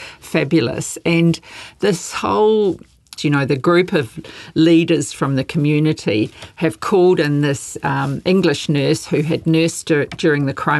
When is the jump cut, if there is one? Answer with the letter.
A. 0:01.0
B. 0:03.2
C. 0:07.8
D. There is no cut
B